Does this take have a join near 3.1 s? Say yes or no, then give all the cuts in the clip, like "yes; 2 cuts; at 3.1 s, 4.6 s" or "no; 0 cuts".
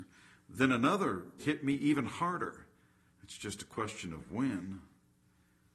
yes; 2 cuts; at 1.4 s, 3.1 s